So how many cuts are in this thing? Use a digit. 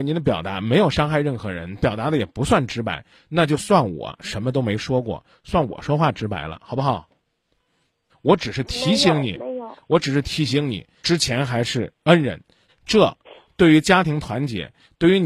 3